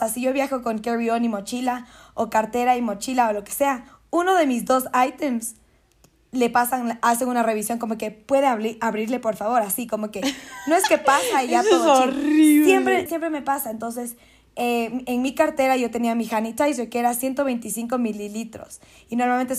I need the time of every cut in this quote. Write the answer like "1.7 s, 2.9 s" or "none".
13.1 s